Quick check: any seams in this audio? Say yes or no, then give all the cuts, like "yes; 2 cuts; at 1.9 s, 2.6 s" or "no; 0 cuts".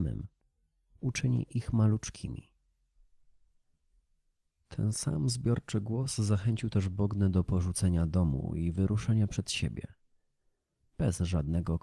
no; 0 cuts